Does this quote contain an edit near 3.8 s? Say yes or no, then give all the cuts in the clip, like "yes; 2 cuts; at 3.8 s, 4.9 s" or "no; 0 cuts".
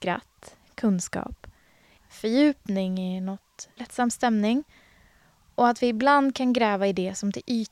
yes; 2 cuts; at 2.0 s, 3.8 s